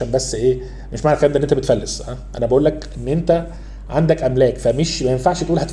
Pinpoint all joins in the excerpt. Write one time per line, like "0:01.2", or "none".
none